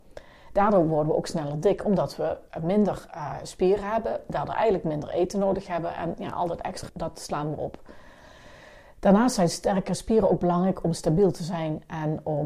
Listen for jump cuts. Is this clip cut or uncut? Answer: cut